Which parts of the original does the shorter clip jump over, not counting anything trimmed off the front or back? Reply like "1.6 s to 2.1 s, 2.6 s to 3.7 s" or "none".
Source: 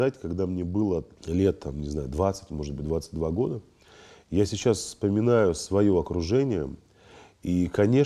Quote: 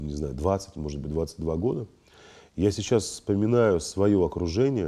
none